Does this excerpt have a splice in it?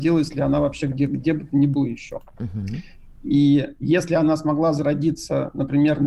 no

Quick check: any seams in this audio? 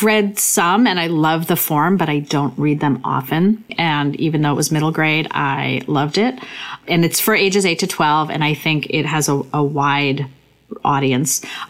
yes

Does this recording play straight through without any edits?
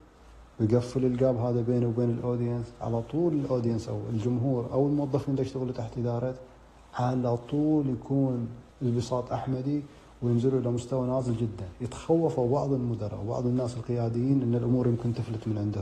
no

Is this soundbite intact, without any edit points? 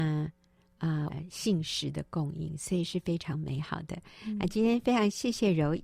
no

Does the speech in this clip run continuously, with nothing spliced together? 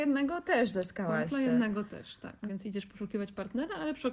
no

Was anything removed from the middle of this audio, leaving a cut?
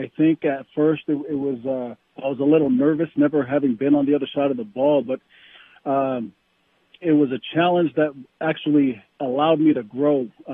yes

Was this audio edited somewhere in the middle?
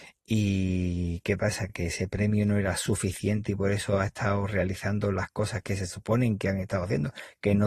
no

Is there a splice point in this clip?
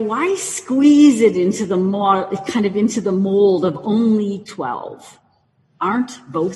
no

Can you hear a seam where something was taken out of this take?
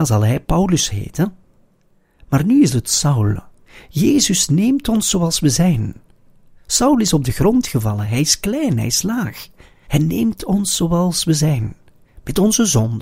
yes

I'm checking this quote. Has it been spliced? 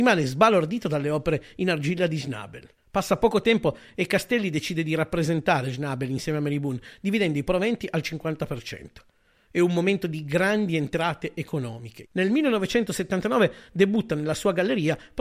yes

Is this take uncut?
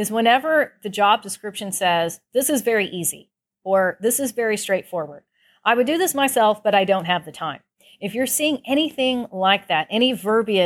yes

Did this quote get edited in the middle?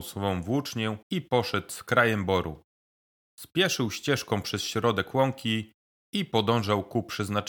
yes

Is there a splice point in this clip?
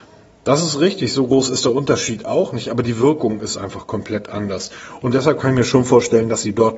no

